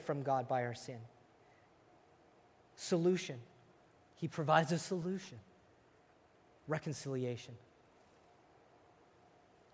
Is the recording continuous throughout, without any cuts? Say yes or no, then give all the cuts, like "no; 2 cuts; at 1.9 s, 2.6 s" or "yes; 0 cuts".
yes; 0 cuts